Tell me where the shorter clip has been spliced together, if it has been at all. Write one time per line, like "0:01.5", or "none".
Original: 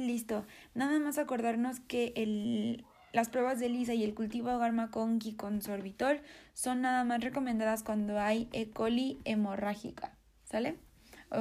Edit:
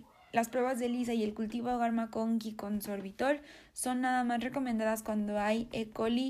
none